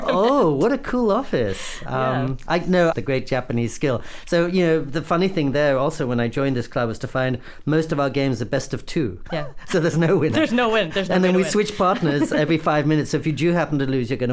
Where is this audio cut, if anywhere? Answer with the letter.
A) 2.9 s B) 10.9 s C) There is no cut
A